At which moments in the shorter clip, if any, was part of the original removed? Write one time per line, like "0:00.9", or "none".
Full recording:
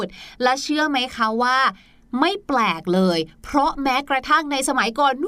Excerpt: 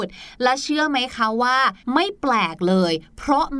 0:01.8